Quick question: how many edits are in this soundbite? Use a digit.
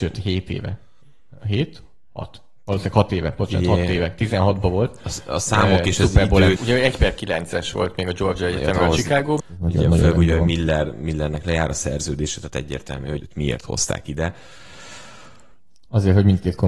3